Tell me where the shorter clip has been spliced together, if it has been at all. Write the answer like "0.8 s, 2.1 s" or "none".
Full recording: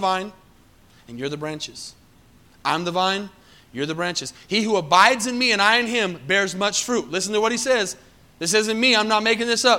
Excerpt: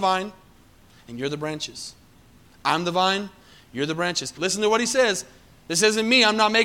4.4 s

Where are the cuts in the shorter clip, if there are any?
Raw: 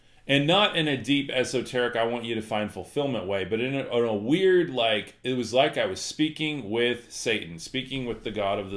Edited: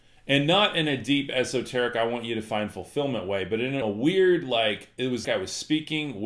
3.8 s, 5.2 s

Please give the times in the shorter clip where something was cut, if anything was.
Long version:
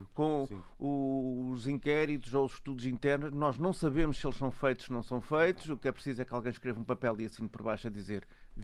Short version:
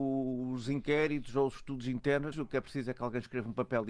2.3 s

